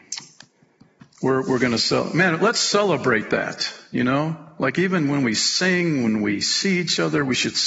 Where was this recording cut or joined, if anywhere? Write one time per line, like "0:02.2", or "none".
none